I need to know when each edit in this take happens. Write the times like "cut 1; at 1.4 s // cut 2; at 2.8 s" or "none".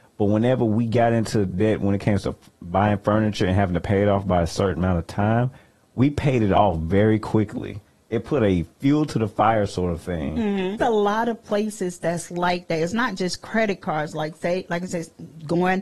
cut 1; at 10.8 s